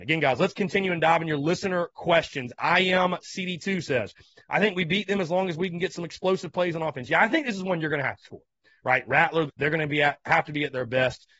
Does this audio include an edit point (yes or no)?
yes